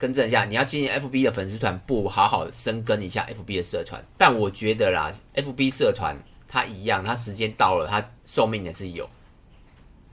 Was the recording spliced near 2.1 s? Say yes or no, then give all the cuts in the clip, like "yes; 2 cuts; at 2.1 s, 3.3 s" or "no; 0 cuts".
no; 2 cuts; at 4.1 s, 8.2 s